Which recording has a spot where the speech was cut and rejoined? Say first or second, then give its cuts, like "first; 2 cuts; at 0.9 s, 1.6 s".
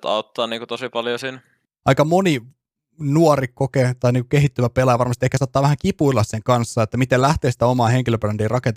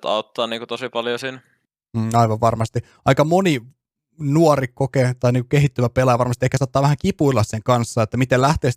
first; 1 cut; at 1.8 s